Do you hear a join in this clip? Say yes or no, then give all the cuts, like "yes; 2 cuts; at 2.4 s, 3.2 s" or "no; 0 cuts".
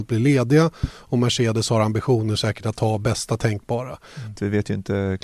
yes; 1 cut; at 4.3 s